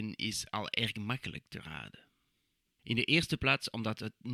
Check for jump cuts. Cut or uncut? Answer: cut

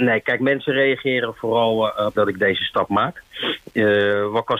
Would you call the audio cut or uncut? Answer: cut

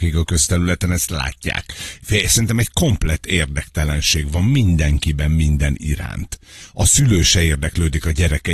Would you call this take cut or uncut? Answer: uncut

